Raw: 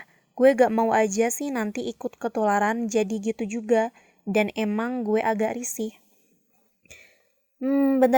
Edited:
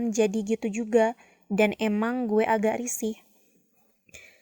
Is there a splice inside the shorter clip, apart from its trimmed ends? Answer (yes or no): no